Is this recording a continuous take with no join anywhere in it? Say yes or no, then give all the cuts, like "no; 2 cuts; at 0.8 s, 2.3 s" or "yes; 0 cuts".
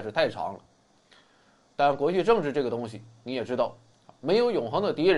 yes; 0 cuts